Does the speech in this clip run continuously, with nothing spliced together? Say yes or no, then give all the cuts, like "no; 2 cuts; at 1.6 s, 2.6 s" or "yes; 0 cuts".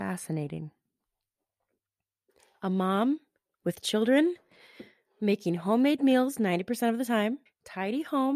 no; 1 cut; at 7.5 s